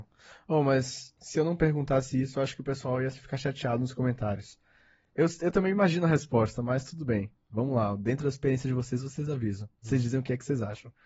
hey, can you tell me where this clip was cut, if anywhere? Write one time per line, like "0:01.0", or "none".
none